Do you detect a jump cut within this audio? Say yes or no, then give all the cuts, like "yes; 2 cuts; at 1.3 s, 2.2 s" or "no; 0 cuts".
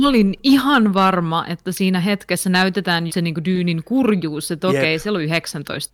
yes; 1 cut; at 3.1 s